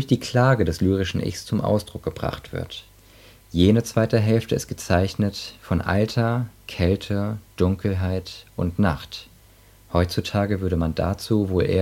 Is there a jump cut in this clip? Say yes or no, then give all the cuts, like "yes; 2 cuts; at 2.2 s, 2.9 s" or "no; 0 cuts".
no; 0 cuts